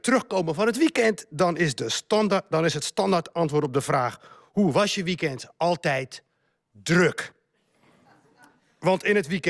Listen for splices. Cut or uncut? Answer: uncut